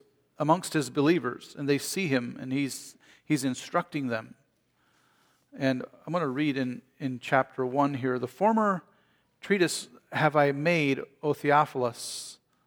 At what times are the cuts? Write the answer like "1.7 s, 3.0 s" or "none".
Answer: none

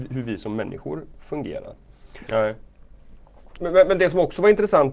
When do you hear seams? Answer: 2.3 s, 3.6 s

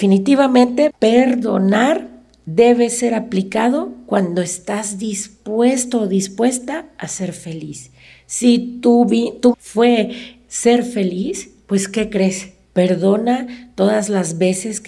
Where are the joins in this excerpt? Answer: 0.9 s, 9.5 s, 12.7 s

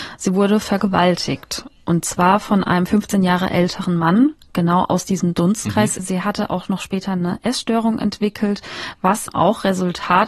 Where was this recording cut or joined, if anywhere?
6.0 s, 9.3 s

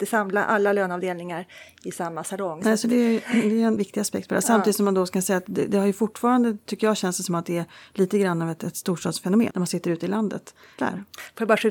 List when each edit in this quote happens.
3.8 s, 9.5 s, 10.8 s

